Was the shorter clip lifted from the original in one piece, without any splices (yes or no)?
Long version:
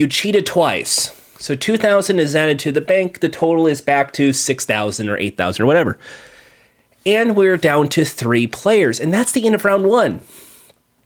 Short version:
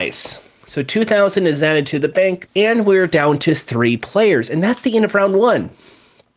no